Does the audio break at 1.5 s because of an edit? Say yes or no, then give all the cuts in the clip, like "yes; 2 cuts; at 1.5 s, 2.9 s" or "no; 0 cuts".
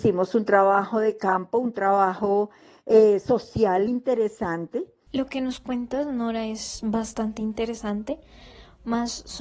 no; 2 cuts; at 3.9 s, 5.1 s